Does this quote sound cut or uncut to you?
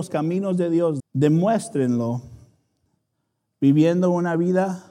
cut